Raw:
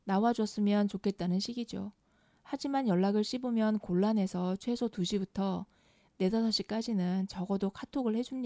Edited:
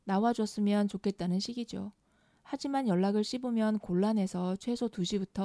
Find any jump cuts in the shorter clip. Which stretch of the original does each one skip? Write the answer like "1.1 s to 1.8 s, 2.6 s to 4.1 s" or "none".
none